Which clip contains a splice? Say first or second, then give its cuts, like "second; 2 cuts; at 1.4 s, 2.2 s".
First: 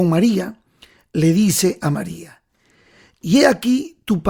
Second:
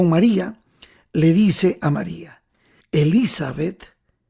second; 1 cut; at 2.8 s